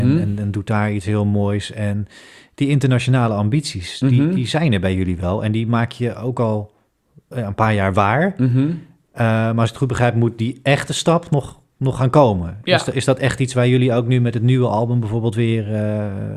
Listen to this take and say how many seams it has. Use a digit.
0